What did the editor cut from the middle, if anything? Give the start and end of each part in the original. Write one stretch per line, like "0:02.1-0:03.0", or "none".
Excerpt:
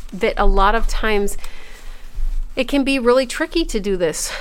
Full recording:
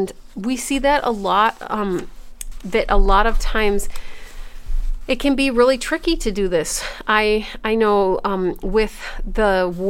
none